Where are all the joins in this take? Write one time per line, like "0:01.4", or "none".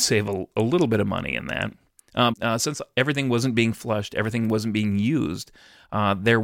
0:02.3